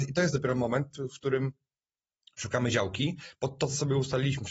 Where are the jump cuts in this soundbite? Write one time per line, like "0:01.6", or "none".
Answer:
none